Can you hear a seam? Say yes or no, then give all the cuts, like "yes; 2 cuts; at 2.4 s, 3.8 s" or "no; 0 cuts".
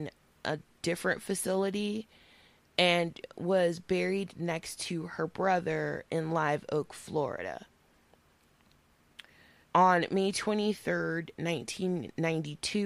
yes; 1 cut; at 9.6 s